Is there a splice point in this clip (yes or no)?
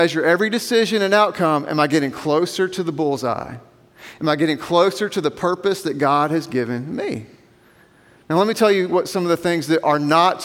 no